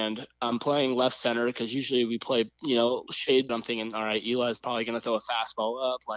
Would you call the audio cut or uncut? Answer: cut